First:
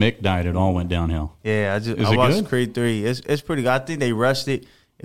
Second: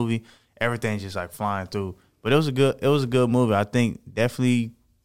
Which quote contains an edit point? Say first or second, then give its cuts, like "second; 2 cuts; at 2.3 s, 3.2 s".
first; 1 cut; at 1.4 s